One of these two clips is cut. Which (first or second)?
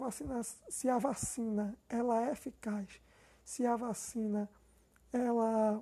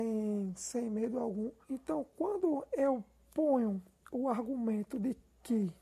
second